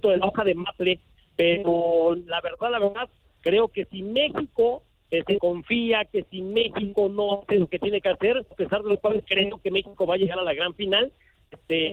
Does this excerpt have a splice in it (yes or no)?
yes